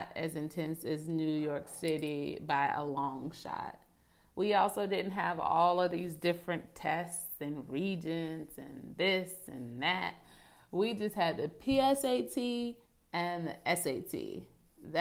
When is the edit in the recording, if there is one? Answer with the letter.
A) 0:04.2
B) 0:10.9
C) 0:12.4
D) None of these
D